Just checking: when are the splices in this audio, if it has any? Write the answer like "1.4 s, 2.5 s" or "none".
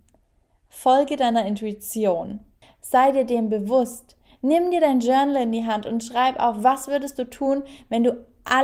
2.6 s

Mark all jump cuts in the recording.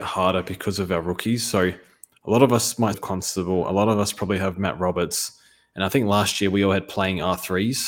2.9 s

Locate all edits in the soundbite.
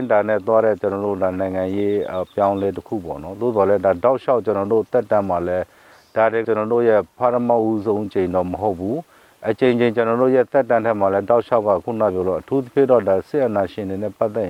6.4 s

